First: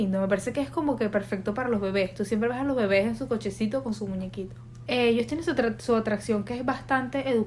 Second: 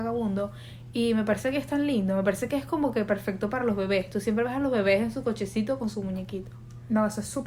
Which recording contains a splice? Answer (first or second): first